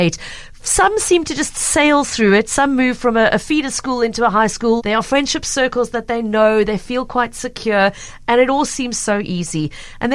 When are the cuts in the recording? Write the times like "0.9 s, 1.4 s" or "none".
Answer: 4.8 s